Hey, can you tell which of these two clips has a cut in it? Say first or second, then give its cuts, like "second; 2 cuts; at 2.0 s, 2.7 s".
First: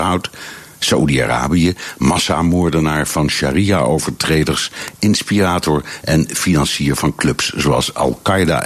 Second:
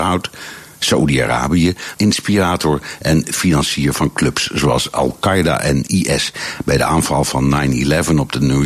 second; 1 cut; at 1.9 s